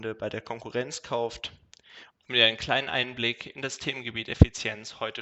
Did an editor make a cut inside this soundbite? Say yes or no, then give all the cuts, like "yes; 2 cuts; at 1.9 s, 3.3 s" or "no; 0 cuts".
yes; 1 cut; at 2.1 s